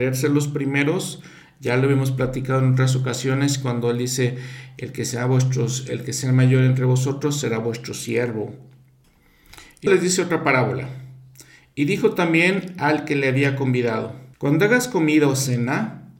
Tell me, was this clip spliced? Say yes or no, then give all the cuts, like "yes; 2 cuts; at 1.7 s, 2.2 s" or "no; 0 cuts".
yes; 2 cuts; at 9.9 s, 14.3 s